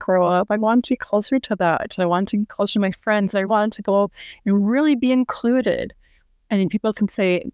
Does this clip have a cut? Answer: yes; 1 cut; at 3.4 s

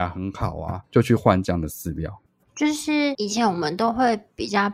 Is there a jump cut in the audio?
no; 0 cuts

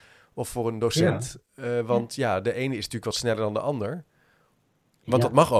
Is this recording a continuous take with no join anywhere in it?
yes; 0 cuts

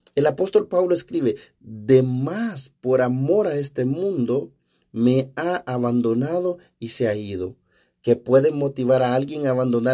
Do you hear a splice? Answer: no; 0 cuts

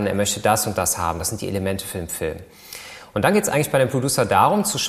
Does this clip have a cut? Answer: no; 0 cuts

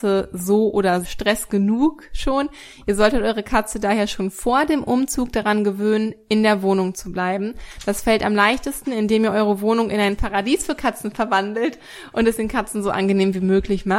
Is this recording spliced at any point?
yes; 1 cut; at 1.0 s

